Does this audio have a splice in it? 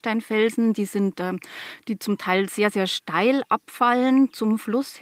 no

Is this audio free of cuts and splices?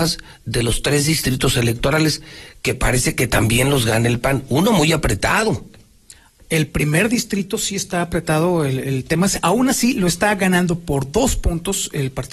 yes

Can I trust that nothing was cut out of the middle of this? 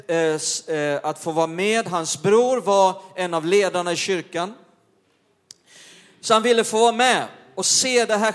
yes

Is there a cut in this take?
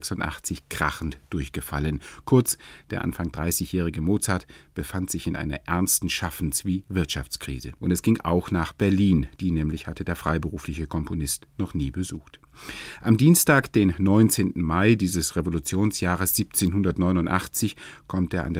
yes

